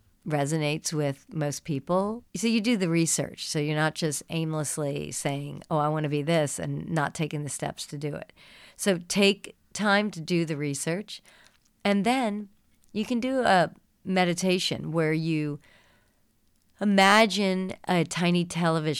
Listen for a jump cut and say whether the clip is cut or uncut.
uncut